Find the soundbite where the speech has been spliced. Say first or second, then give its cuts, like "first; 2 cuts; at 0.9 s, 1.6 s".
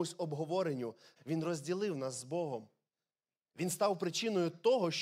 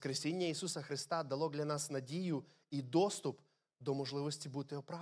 first; 1 cut; at 1.2 s